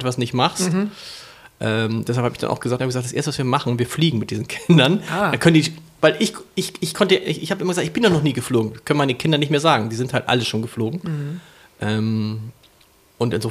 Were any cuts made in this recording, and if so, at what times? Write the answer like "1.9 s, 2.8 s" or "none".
2.8 s